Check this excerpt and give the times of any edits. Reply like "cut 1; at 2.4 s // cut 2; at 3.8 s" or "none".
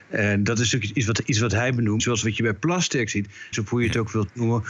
cut 1; at 2.0 s // cut 2; at 3.5 s